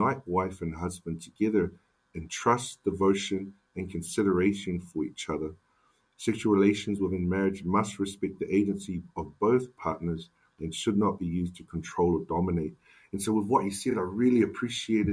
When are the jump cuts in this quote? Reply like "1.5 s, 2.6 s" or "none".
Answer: none